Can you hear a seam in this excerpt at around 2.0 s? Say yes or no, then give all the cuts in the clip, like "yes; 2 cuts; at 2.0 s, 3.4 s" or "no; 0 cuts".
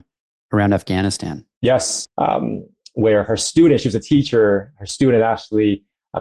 yes; 1 cut; at 2.0 s